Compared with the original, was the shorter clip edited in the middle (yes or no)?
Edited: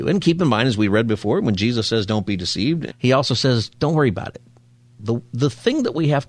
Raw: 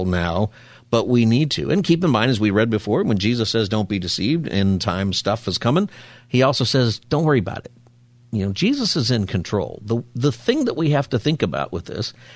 yes